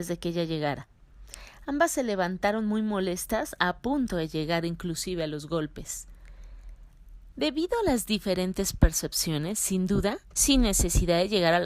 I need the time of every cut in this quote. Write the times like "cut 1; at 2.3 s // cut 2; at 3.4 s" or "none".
cut 1; at 7.3 s // cut 2; at 10.3 s